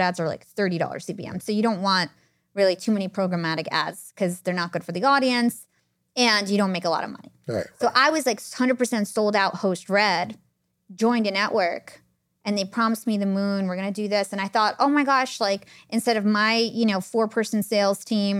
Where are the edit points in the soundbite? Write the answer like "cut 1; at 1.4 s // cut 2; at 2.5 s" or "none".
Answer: none